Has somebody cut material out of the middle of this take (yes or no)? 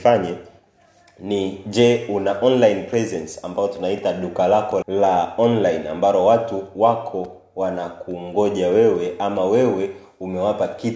yes